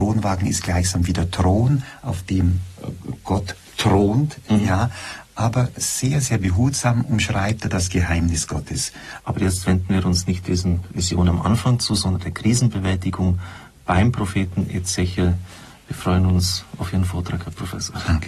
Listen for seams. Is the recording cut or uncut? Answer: cut